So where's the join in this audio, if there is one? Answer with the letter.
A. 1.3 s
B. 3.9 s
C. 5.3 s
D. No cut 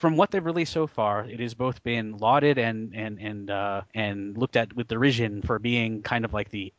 B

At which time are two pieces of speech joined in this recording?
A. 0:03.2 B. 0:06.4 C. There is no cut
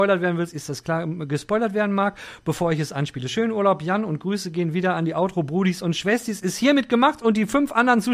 C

